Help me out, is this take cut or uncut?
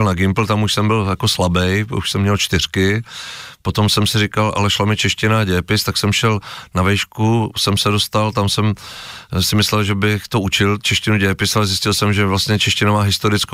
uncut